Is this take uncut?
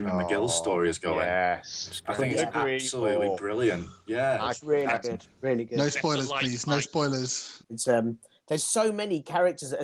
no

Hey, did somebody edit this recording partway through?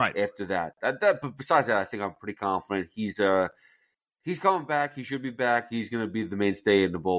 no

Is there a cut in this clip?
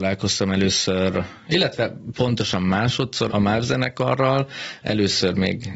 yes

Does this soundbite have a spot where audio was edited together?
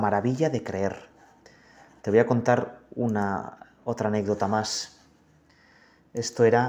no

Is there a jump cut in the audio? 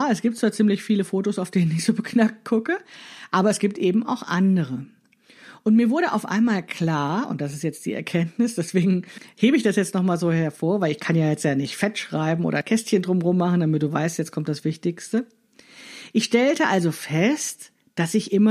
no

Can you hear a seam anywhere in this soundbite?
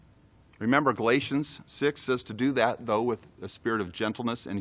no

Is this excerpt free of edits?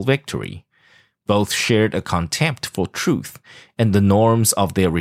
yes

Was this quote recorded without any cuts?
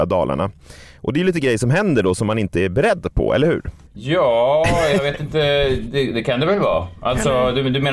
yes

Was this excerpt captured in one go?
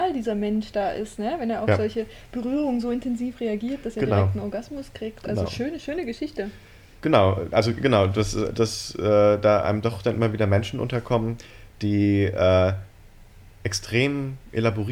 no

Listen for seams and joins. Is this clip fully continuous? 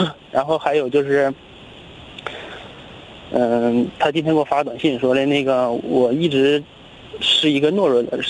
yes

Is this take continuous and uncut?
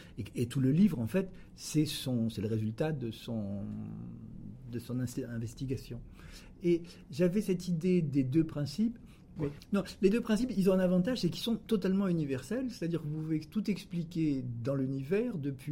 no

